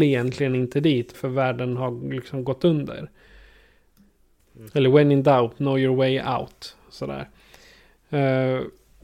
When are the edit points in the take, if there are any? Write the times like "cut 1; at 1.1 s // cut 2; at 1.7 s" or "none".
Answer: cut 1; at 1.1 s // cut 2; at 4.4 s